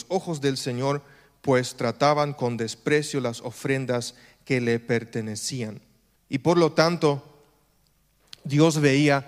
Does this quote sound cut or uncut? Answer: cut